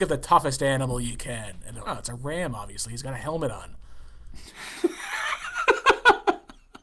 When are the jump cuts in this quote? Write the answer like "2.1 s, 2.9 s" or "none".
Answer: 1.8 s

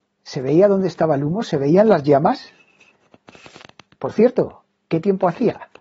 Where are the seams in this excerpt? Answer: none

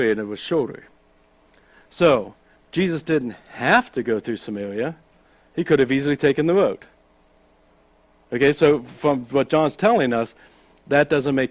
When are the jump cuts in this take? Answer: 2.6 s

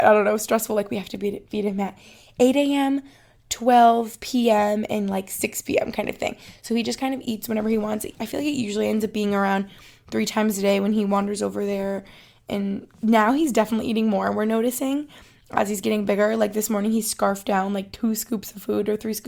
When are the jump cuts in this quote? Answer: none

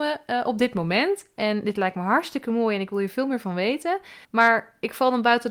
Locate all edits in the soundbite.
4.2 s

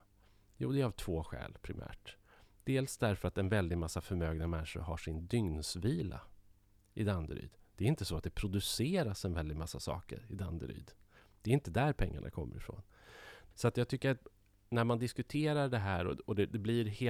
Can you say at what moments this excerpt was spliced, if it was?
13.5 s

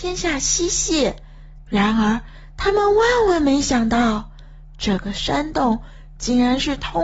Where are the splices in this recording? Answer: 1.6 s

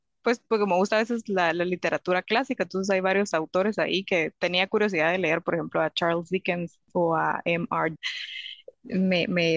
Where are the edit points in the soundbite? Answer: 8.0 s

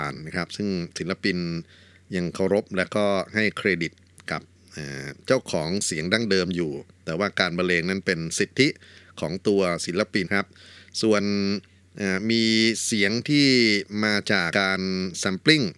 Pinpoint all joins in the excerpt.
10.2 s, 14.5 s

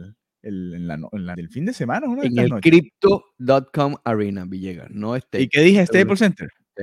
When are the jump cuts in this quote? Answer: 1.3 s

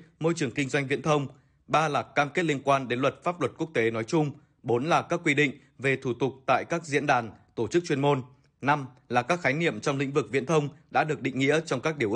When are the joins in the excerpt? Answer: none

